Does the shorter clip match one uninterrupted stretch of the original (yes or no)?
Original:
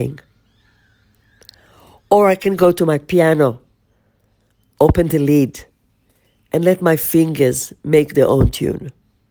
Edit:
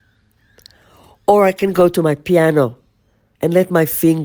no